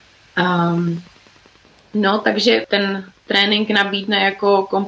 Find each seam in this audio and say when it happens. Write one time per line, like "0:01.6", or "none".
0:02.6